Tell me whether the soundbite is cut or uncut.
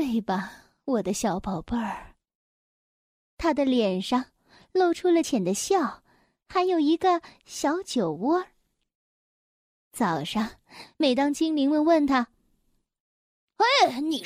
cut